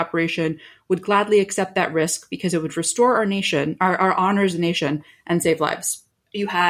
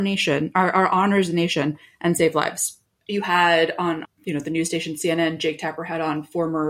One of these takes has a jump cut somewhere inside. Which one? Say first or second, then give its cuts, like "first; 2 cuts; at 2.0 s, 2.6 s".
second; 1 cut; at 4.0 s